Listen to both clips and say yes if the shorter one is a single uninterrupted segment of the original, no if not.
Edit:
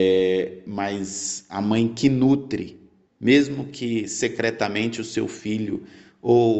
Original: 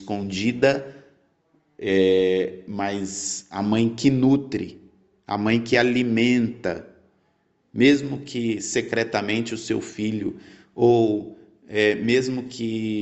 no